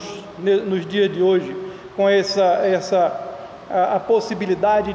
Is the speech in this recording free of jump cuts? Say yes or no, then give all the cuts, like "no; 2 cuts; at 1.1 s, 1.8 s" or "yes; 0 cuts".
yes; 0 cuts